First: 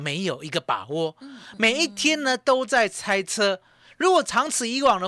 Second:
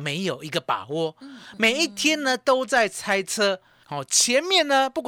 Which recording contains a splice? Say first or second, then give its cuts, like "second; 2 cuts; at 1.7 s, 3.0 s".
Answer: second; 1 cut; at 3.8 s